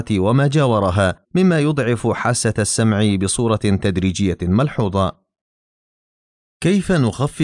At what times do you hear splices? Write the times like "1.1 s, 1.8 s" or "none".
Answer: 1.2 s

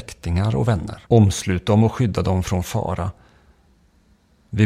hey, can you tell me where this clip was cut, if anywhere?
1.0 s

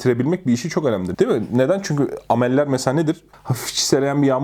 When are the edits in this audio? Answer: 1.1 s, 3.3 s

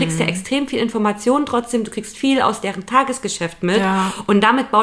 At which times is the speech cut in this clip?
none

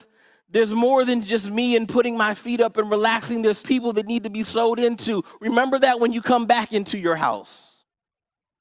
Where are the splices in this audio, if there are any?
3.6 s

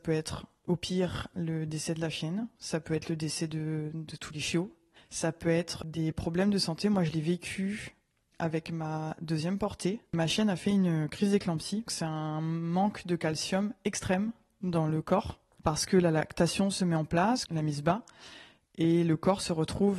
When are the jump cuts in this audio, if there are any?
11.9 s, 17.5 s

